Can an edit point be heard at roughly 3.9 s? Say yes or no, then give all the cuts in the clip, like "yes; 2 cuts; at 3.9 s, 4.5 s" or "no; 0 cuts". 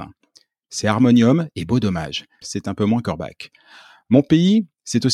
no; 1 cut; at 2.4 s